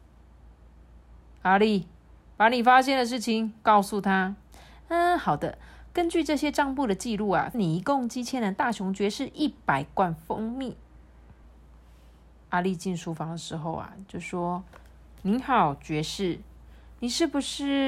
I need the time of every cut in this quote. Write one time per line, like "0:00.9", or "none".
0:07.5
0:11.4